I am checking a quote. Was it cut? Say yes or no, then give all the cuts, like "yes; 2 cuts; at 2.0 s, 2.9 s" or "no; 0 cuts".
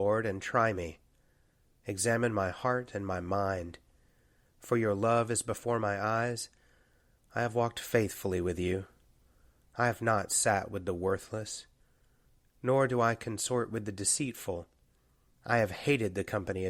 no; 0 cuts